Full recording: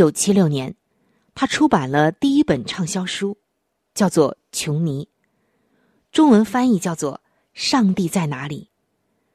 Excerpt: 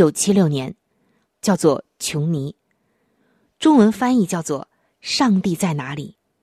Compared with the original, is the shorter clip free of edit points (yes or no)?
no